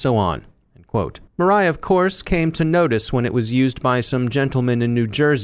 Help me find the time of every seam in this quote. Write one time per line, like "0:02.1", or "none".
0:01.3